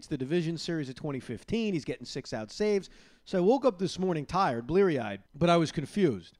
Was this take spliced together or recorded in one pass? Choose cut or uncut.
cut